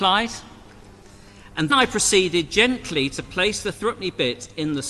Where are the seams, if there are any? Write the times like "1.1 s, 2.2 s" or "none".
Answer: 1.7 s